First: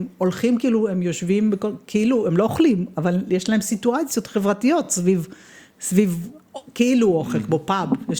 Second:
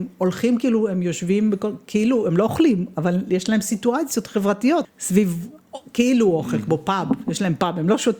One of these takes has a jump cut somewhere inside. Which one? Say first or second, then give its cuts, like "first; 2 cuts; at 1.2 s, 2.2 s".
second; 1 cut; at 4.8 s